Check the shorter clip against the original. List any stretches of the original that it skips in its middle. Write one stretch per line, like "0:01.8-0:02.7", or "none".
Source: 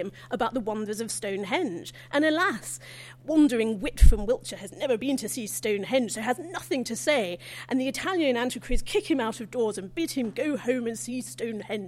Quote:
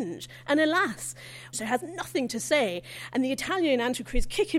0:03.2-0:06.1